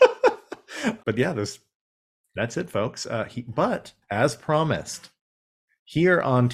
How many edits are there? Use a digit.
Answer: 1